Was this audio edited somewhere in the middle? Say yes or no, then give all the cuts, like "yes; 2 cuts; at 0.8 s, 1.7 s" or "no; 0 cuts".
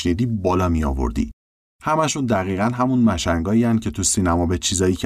yes; 1 cut; at 1.6 s